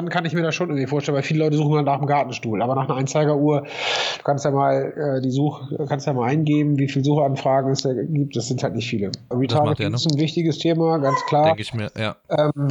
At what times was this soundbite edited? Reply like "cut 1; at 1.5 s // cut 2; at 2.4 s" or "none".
cut 1; at 9.3 s